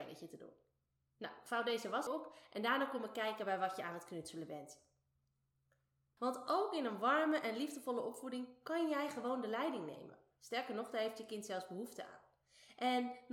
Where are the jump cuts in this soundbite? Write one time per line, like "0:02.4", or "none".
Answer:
0:02.1
0:06.2